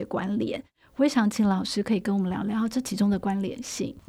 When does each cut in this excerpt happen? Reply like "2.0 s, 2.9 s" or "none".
none

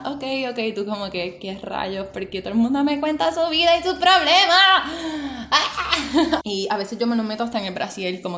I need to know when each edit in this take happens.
6.4 s

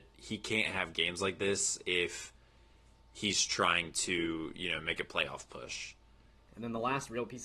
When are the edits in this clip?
6.5 s

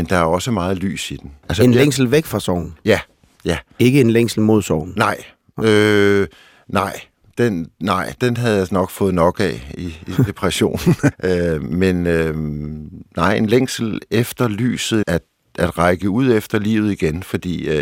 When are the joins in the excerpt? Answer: 8.2 s, 11.1 s, 15.0 s

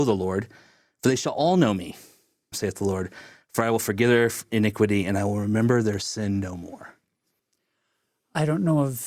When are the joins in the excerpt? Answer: 2.5 s

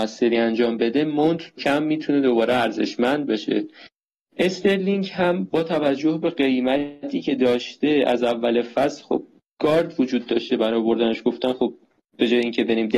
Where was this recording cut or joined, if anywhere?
1.6 s

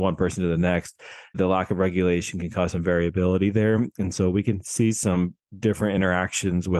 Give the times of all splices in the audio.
1.3 s

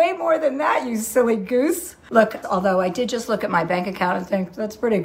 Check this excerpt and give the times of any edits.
2.4 s

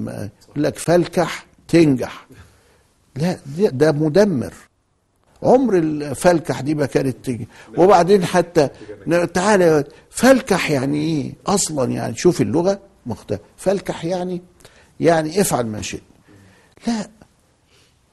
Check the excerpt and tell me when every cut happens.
3.7 s

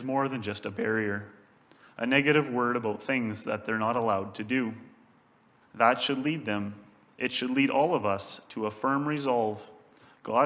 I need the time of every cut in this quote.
5.6 s

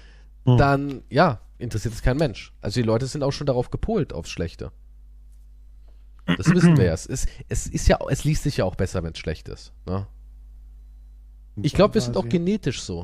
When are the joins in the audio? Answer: 9.8 s, 11.6 s

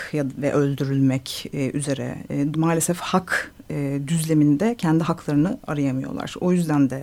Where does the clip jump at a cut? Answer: 2.5 s

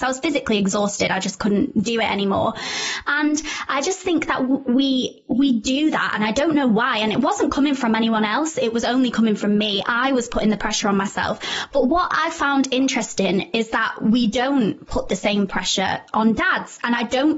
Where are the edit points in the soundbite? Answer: none

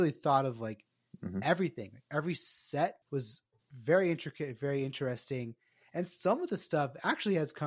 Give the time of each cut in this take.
3.0 s

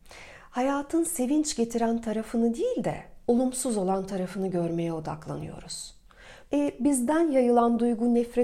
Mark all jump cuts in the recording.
6.4 s

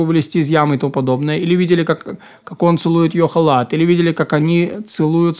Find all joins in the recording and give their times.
none

